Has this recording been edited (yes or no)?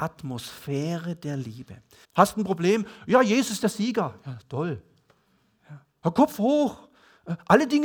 yes